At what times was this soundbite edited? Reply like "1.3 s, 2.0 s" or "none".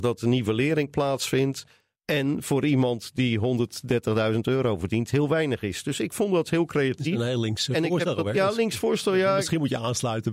2.0 s